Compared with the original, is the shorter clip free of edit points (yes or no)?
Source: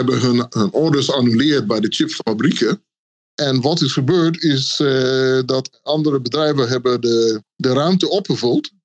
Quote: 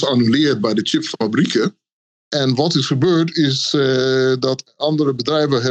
yes